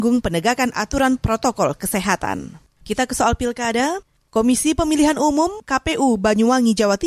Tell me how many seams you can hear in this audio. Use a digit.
1